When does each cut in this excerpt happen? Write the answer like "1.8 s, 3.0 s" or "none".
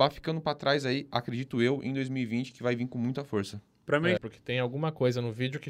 4.2 s